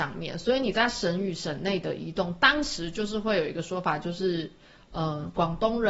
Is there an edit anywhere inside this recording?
no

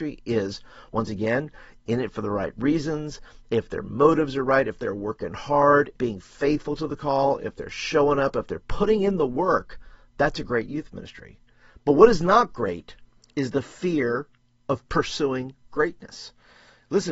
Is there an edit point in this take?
yes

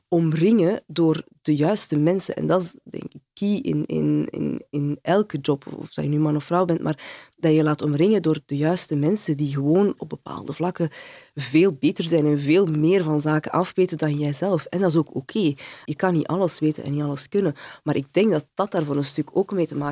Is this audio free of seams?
yes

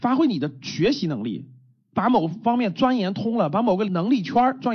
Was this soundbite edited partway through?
no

